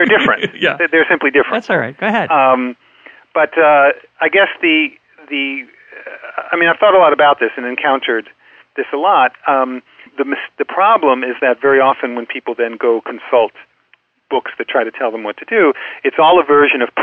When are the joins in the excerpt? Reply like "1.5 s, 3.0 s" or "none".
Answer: 10.1 s